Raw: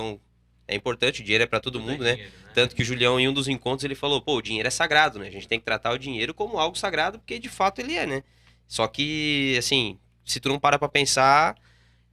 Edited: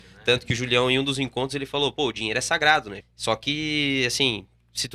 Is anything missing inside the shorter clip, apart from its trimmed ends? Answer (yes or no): yes